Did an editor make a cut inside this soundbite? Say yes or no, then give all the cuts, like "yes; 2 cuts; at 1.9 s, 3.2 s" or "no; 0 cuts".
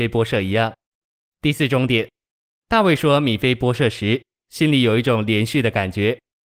yes; 1 cut; at 1.3 s